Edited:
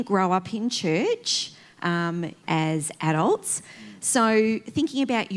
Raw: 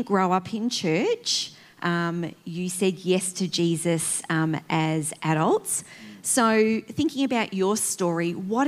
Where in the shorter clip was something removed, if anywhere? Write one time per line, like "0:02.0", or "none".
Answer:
0:02.4